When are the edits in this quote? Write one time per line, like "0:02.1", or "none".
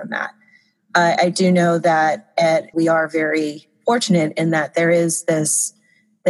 0:02.7